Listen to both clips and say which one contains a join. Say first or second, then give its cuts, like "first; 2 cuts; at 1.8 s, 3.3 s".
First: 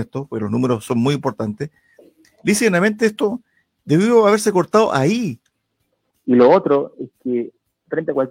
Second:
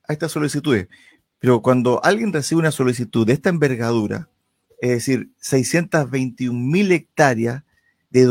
first; 1 cut; at 6.1 s